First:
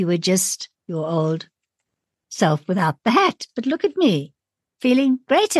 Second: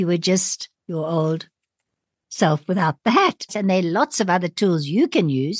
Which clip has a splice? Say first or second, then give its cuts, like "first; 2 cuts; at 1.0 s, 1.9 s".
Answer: second; 1 cut; at 3.5 s